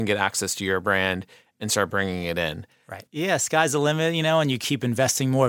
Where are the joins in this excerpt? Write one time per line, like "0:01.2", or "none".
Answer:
0:03.1